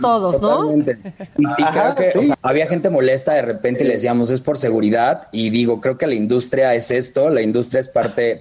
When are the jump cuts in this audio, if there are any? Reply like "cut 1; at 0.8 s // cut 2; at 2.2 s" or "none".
cut 1; at 2.3 s

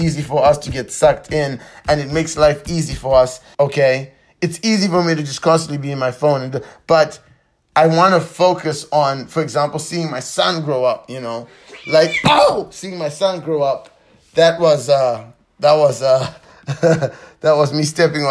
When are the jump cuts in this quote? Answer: cut 1; at 3.5 s

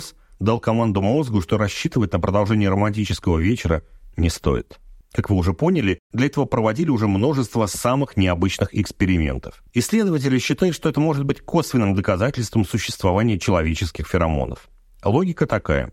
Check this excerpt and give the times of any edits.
cut 1; at 5.0 s // cut 2; at 9.7 s

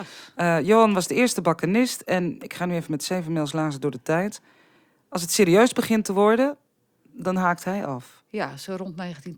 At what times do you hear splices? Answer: none

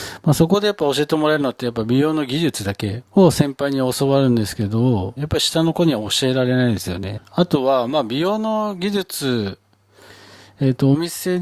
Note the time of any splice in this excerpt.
cut 1; at 3.1 s // cut 2; at 5.2 s // cut 3; at 7.2 s

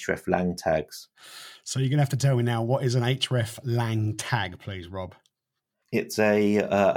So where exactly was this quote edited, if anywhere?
cut 1; at 5.8 s

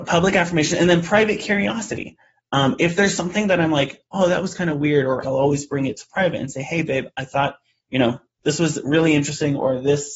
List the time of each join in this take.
cut 1; at 5.2 s

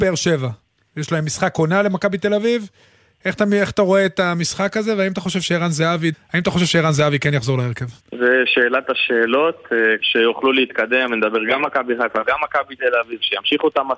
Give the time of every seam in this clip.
cut 1; at 6.1 s // cut 2; at 8.0 s // cut 3; at 10.0 s

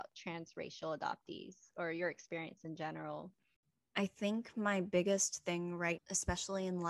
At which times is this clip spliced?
cut 1; at 6.0 s

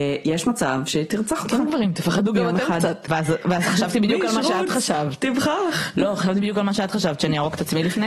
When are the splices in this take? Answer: cut 1; at 3.1 s

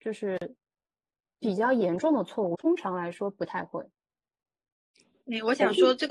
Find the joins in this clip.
cut 1; at 2.5 s

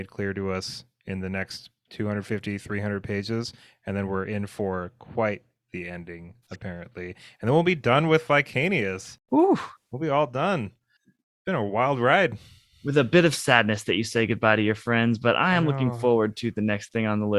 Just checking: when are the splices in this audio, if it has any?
none

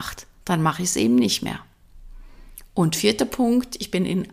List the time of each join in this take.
none

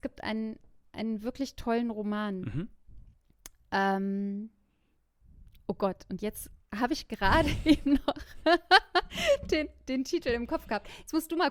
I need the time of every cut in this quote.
none

